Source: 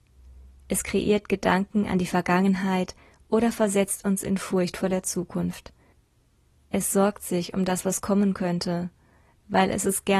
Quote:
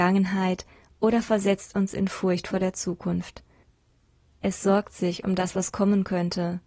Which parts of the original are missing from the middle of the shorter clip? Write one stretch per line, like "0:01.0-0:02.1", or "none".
none